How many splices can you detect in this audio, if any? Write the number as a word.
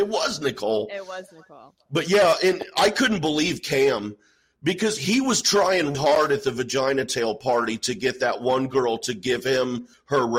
one